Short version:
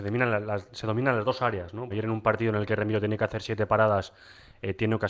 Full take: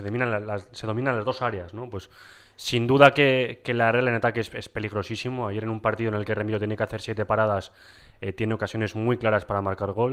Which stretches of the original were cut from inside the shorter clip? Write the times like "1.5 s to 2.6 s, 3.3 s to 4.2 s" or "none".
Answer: 1.9 s to 5.5 s